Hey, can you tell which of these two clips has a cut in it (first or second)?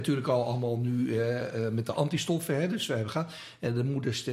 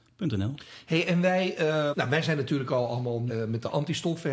second